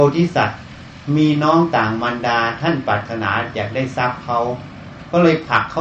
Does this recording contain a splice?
no; 0 cuts

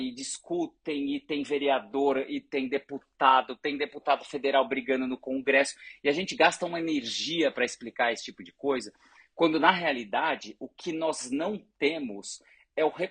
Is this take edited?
no; 0 cuts

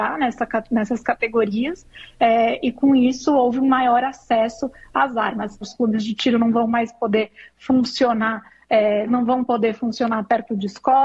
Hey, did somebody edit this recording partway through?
yes; 2 cuts; at 5.6 s, 9.1 s

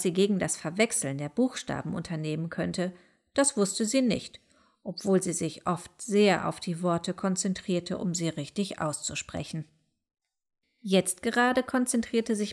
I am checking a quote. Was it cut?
no; 0 cuts

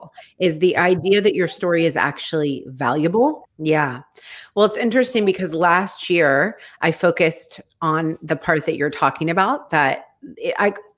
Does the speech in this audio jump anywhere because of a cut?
yes; 1 cut; at 3.5 s

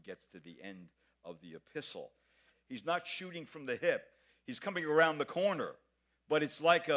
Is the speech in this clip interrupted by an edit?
yes; 1 cut; at 2.5 s

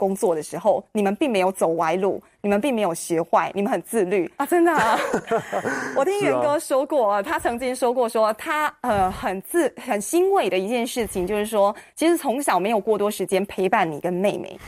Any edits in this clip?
yes; 1 cut; at 4.4 s

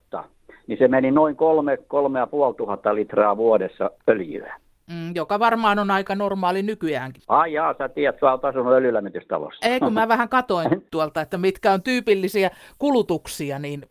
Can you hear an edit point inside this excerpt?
no; 0 cuts

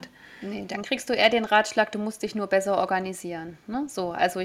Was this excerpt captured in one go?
yes; 0 cuts

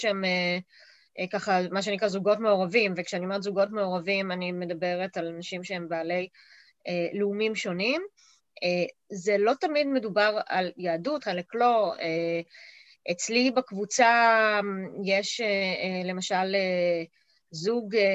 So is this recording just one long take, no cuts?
no; 1 cut; at 11.2 s

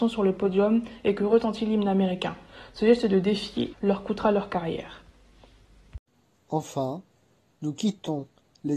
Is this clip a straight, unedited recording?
no; 1 cut; at 3.7 s

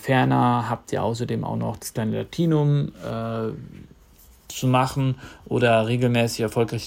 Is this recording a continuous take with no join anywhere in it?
yes; 0 cuts

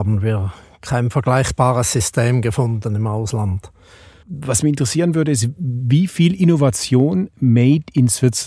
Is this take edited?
yes; 1 cut; at 4.2 s

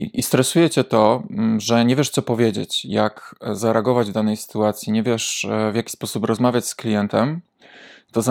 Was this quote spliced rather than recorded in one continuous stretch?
no; 0 cuts

